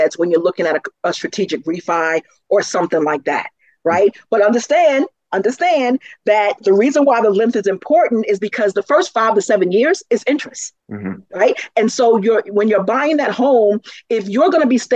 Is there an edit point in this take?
yes; 1 cut; at 10.8 s

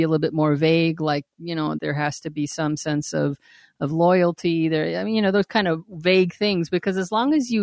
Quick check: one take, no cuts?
no; 1 cut; at 1.8 s

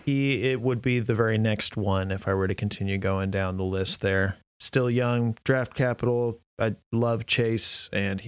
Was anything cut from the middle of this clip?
no; 0 cuts

